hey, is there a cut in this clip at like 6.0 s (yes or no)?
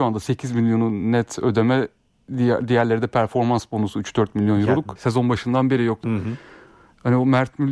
yes